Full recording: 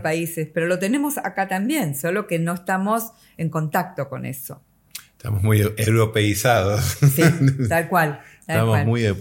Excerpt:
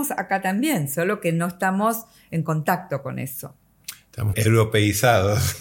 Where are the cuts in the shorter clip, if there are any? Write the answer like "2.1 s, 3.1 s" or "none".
4.3 s